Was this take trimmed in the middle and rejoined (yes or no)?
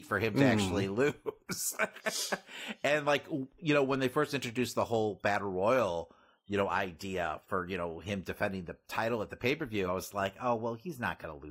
no